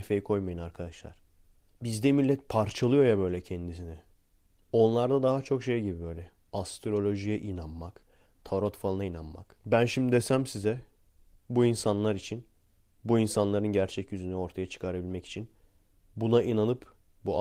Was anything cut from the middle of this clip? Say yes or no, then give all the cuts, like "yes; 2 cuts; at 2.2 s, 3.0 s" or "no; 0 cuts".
yes; 1 cut; at 9.6 s